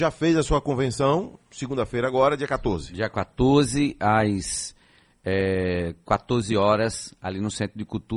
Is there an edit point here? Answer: no; 0 cuts

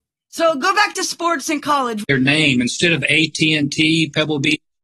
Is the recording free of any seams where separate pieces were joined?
no; 1 cut; at 2.0 s

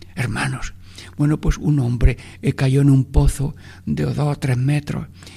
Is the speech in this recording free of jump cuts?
yes; 0 cuts

